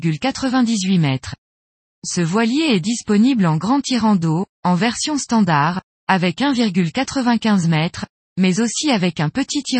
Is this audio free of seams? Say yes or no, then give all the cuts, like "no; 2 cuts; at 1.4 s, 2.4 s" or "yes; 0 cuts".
yes; 0 cuts